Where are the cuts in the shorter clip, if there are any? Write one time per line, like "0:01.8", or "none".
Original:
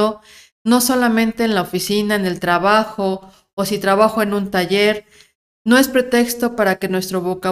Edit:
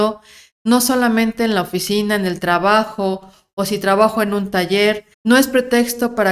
0:05.1